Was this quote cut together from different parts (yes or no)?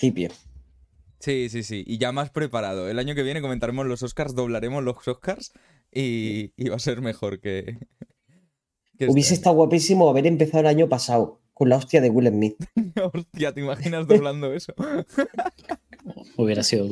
no